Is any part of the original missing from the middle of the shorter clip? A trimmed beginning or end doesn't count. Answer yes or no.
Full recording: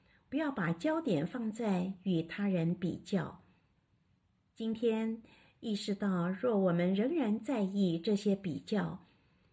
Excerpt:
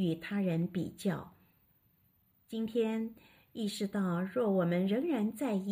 no